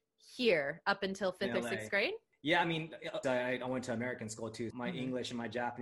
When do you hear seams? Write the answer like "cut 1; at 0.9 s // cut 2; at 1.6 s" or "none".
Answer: cut 1; at 3.2 s // cut 2; at 4.7 s